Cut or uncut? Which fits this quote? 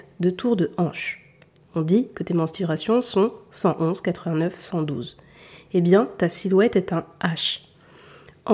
uncut